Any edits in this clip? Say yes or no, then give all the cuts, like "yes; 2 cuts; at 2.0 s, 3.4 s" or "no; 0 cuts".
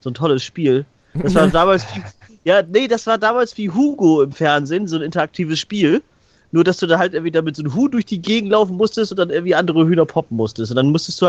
no; 0 cuts